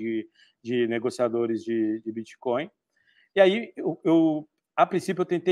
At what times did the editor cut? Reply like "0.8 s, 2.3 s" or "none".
none